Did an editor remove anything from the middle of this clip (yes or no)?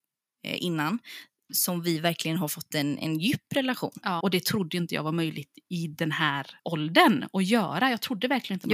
yes